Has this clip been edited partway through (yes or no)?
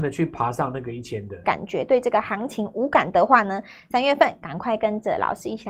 yes